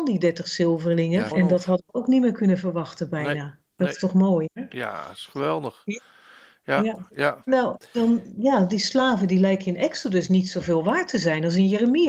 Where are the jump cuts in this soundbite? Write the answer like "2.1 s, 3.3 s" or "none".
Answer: 1.3 s